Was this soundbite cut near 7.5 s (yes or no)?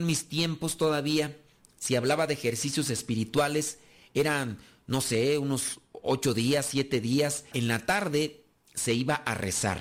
yes